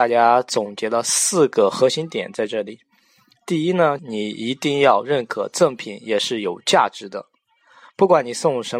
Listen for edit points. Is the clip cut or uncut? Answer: cut